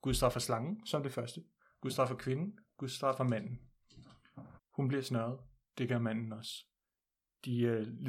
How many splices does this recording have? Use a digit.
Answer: 1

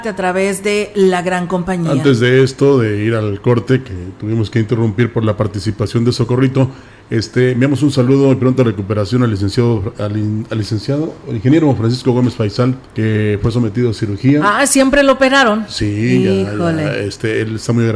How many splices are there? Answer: 1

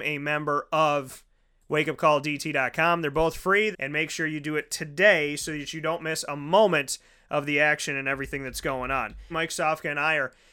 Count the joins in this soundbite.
2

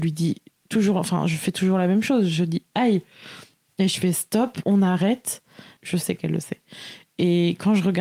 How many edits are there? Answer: 1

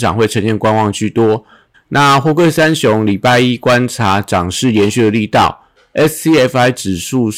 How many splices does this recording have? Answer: 1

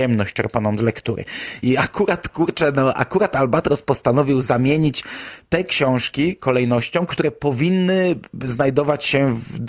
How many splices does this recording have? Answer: 1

